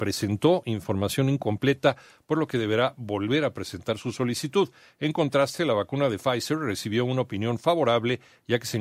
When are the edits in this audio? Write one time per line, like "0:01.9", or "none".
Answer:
none